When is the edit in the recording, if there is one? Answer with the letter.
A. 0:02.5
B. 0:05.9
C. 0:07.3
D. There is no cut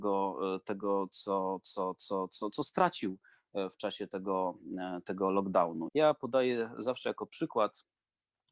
B